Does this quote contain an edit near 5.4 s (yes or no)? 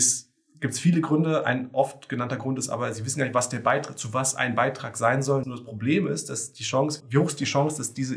yes